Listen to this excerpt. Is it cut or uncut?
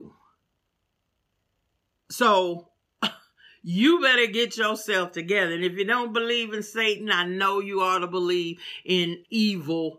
uncut